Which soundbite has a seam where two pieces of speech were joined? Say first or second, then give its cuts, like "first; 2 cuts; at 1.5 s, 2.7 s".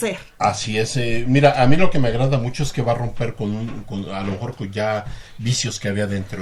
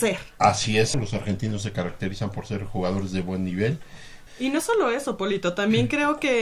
second; 2 cuts; at 0.9 s, 4.3 s